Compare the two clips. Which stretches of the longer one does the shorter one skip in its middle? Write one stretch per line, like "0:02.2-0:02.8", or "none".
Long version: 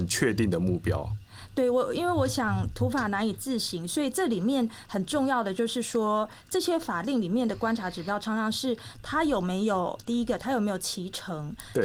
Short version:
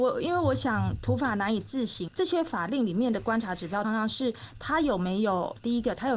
0:03.8-0:06.4
0:08.2-0:08.3